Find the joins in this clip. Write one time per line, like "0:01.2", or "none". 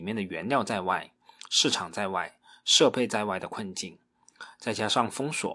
none